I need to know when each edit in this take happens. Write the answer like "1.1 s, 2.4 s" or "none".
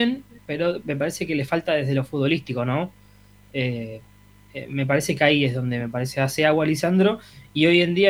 none